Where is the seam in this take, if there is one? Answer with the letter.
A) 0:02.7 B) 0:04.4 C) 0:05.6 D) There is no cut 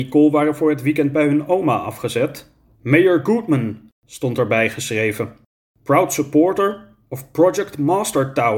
A